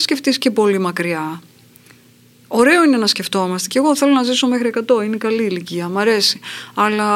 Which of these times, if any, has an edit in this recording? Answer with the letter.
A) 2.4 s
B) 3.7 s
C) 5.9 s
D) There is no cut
D